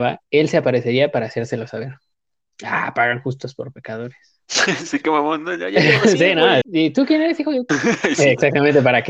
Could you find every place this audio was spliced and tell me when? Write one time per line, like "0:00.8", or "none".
0:06.6
0:07.7